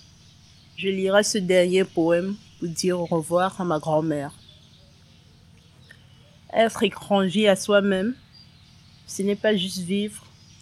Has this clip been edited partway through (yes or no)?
no